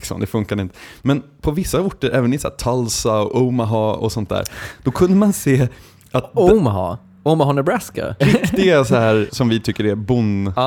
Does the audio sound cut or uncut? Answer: cut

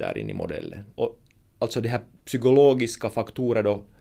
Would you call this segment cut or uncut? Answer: cut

